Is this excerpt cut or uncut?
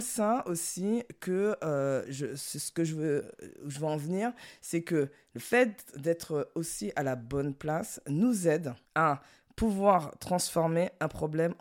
cut